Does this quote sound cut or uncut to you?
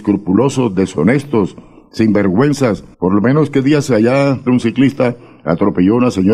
cut